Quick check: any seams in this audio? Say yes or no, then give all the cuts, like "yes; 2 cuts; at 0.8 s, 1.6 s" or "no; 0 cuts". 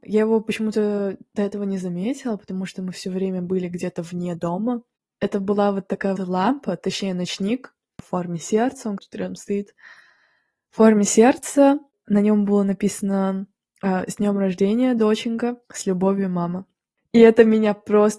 yes; 3 cuts; at 6.2 s, 9.0 s, 15.6 s